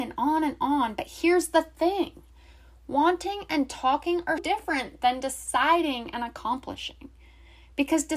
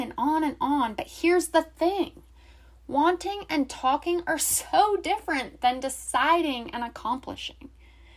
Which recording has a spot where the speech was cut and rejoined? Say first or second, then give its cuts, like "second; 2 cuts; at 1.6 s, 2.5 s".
first; 1 cut; at 4.4 s